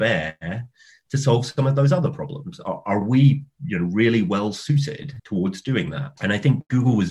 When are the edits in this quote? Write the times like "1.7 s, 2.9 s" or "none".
none